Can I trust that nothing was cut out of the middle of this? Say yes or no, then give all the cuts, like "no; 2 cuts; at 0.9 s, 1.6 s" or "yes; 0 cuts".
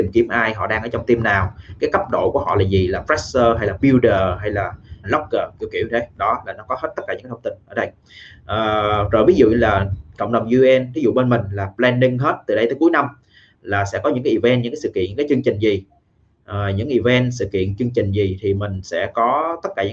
no; 1 cut; at 5.0 s